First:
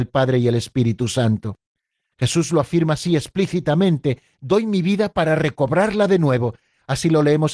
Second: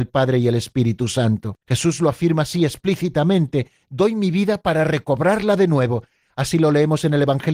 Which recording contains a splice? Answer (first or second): second